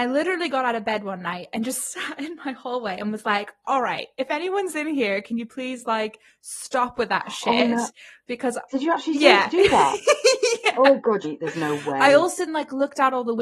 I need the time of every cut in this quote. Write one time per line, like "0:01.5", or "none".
0:11.2
0:12.5